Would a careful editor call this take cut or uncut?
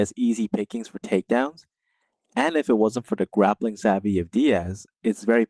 uncut